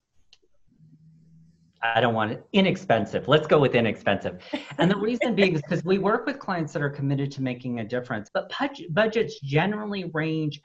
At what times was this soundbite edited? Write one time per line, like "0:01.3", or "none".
0:08.3

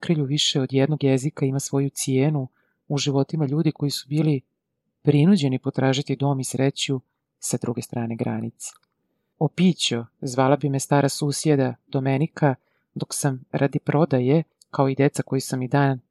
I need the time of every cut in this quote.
0:09.3

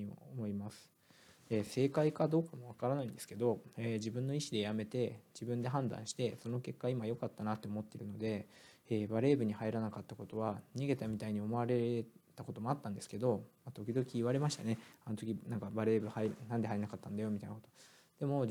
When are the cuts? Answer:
none

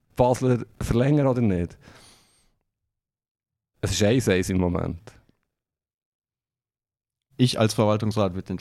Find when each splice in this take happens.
none

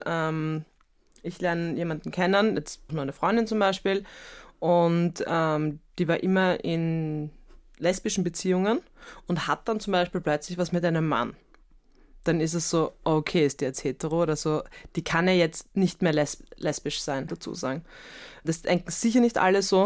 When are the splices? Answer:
0:02.9
0:17.3

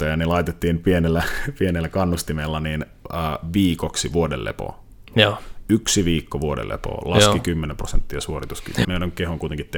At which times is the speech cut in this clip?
0:05.1
0:08.8

